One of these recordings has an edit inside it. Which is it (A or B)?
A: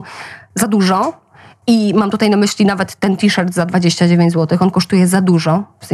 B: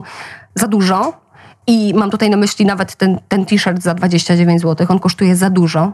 A